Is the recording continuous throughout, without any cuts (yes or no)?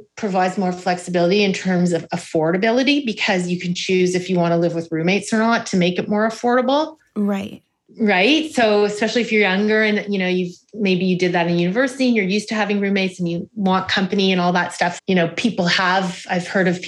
no